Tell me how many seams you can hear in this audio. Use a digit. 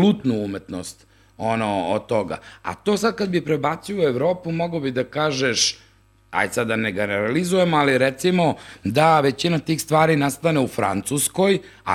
0